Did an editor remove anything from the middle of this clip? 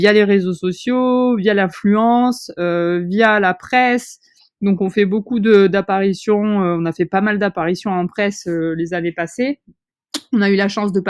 no; 0 cuts

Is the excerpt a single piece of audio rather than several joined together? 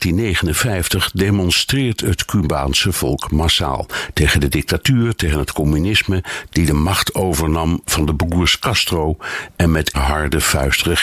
no; 2 cuts; at 6.5 s, 9.9 s

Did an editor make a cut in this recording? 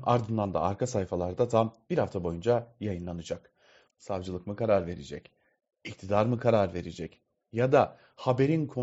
yes; 1 cut; at 3.9 s

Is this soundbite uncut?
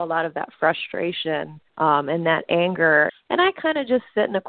no; 2 cuts; at 1.7 s, 3.1 s

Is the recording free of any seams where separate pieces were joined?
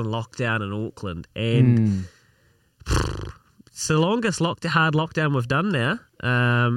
yes; 0 cuts

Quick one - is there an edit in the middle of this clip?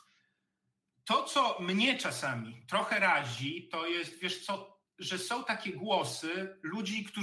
no; 0 cuts

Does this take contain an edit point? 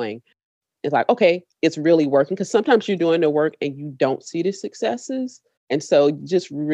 yes; 1 cut; at 5.6 s

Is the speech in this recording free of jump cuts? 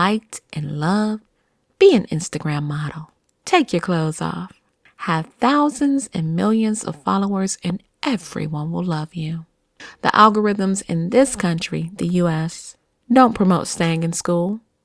yes; 0 cuts

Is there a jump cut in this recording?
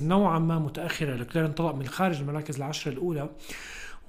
yes; 1 cut; at 1.9 s

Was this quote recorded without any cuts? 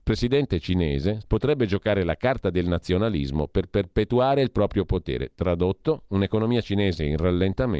no; 1 cut; at 1.2 s

